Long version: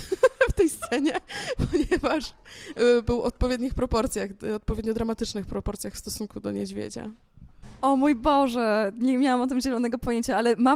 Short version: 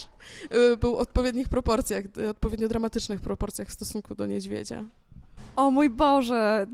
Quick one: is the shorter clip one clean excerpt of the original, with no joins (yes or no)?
yes